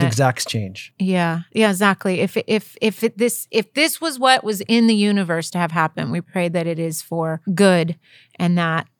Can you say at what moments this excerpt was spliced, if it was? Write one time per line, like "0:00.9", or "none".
0:07.4